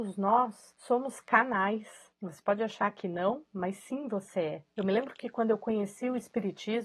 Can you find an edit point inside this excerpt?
no; 0 cuts

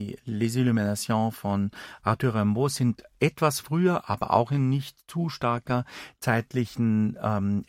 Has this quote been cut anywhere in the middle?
no; 0 cuts

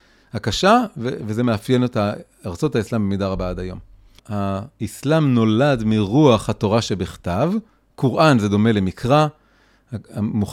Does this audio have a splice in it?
yes; 1 cut; at 4.2 s

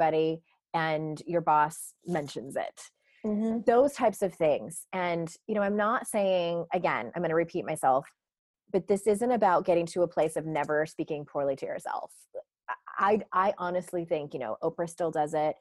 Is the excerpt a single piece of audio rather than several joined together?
yes; 0 cuts

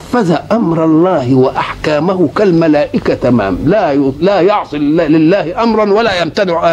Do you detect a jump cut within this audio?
no; 0 cuts

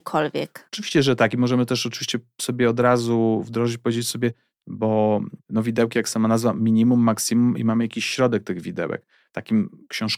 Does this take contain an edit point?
yes; 1 cut; at 4.6 s

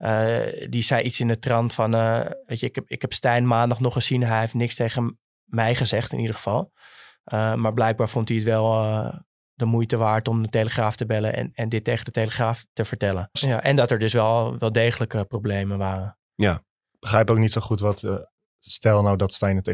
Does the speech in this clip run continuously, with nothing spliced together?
no; 1 cut; at 13.4 s

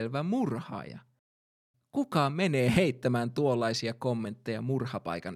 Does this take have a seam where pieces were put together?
yes; 1 cut; at 1.7 s

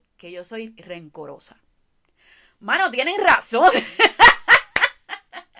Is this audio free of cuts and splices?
yes; 0 cuts

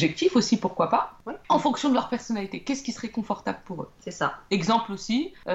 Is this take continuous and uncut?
no; 1 cut; at 4.5 s

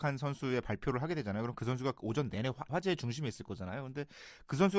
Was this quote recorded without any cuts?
no; 1 cut; at 2.7 s

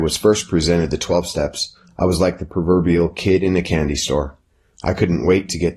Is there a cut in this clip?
no; 0 cuts

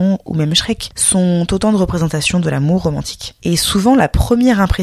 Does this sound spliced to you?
no; 0 cuts

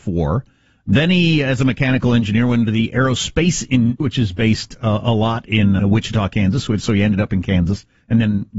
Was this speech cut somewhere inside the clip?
yes; 2 cuts; at 4.0 s, 5.8 s

